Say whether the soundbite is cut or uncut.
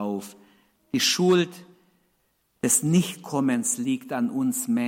uncut